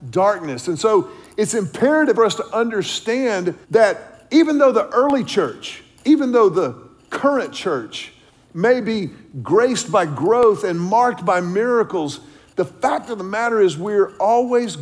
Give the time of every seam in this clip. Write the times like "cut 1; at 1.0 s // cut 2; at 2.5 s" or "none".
cut 1; at 2.1 s // cut 2; at 3.6 s